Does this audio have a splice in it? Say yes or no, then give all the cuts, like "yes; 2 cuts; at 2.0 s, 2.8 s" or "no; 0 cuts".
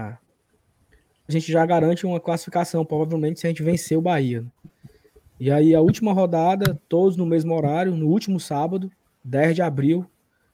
yes; 1 cut; at 1.3 s